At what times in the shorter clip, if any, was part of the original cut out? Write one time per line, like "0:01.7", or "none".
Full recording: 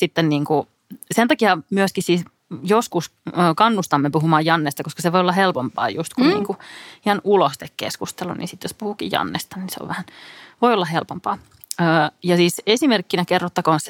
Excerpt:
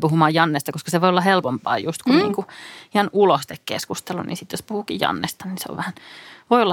none